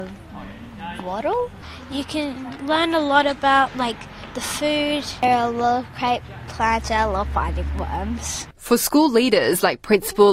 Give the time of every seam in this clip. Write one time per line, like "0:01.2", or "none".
none